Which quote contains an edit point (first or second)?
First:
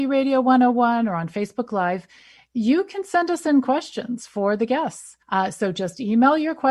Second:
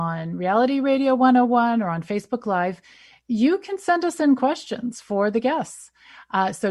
first